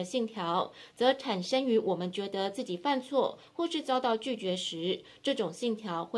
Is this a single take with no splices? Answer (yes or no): yes